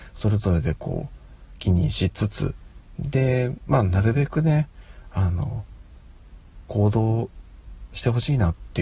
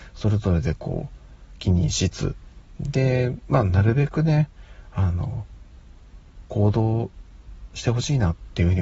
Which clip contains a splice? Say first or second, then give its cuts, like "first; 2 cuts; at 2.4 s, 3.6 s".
second; 1 cut; at 2.1 s